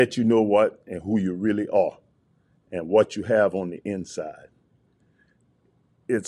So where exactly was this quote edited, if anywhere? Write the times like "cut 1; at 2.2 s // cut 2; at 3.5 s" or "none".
none